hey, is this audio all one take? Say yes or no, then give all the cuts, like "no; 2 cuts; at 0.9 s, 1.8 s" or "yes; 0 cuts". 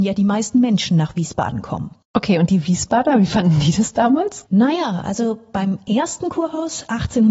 yes; 0 cuts